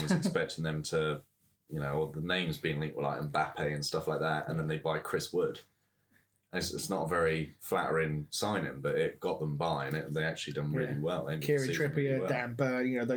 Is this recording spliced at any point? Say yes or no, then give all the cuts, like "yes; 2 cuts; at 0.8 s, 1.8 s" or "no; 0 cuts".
no; 0 cuts